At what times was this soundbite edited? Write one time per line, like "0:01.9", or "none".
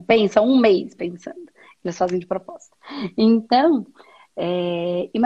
none